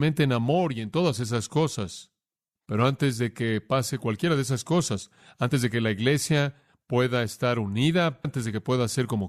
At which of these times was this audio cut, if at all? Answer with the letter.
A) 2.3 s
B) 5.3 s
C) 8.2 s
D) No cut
C